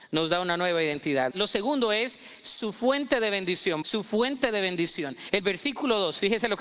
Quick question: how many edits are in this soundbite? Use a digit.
2